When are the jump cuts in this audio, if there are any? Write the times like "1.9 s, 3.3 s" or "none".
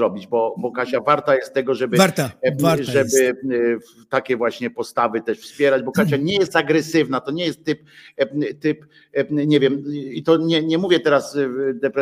none

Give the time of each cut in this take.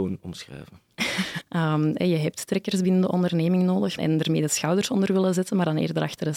1.4 s, 4.0 s

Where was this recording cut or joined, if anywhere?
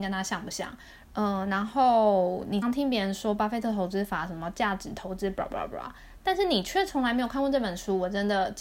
1.0 s, 2.6 s

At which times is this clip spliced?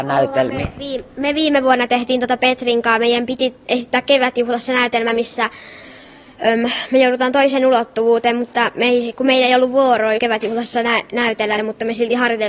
10.2 s, 11.6 s

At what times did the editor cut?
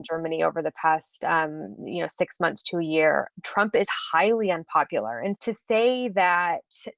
3.3 s, 5.4 s

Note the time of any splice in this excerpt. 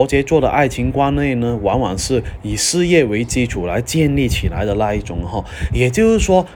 none

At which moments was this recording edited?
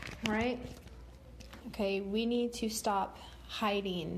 1.6 s

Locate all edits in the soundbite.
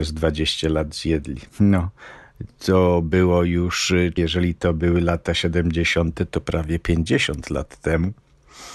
1.5 s, 4.2 s

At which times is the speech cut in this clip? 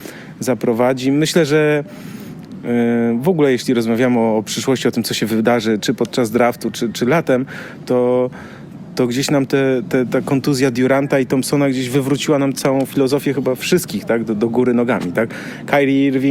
12.5 s

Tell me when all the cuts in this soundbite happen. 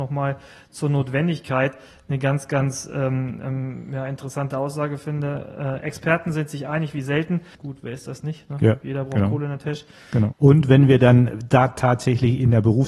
7.5 s, 10.3 s

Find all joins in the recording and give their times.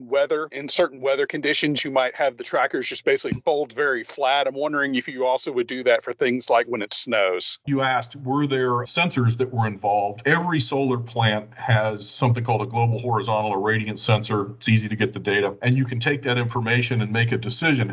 7.6 s

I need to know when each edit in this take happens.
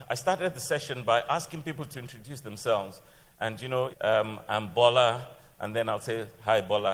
3.9 s

